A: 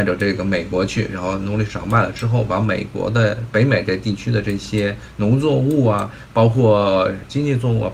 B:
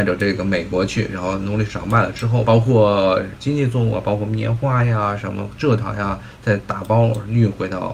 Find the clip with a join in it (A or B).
B